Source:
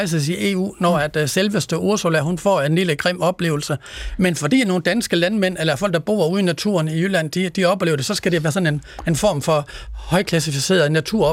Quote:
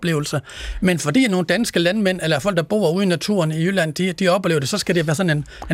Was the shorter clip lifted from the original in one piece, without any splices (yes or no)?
yes